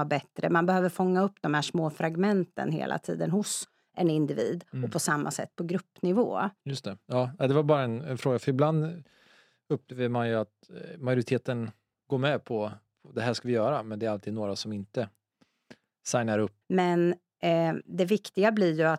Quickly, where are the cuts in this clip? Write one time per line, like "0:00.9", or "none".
0:06.6
0:16.6